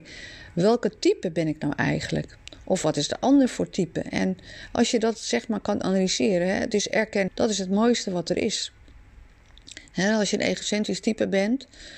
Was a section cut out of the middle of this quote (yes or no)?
yes